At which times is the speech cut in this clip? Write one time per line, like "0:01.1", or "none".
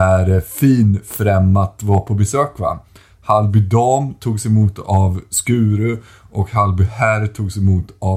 none